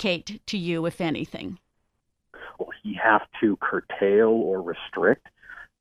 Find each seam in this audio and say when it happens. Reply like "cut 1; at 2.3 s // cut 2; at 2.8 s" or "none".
cut 1; at 2.6 s